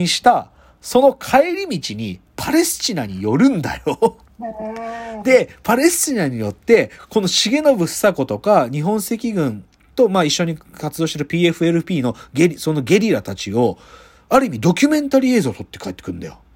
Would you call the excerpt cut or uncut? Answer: uncut